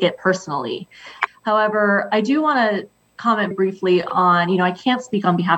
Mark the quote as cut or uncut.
cut